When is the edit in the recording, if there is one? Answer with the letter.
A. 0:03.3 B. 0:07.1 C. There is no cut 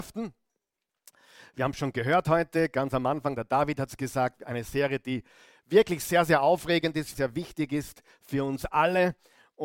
B